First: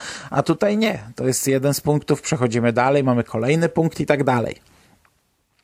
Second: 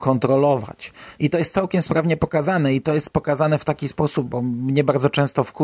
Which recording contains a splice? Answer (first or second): second